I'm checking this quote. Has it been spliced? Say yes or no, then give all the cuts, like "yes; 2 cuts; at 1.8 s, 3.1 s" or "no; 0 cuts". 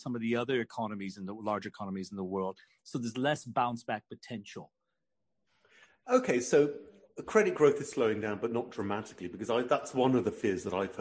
no; 0 cuts